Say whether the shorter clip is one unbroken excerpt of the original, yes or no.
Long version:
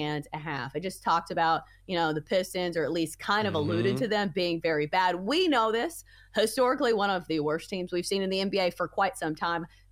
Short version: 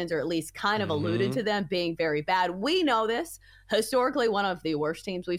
yes